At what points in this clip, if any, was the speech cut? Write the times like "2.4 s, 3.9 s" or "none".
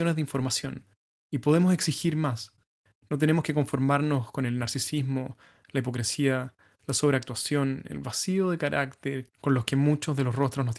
none